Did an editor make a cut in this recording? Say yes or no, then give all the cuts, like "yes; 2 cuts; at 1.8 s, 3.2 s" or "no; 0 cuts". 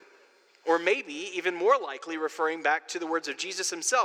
no; 0 cuts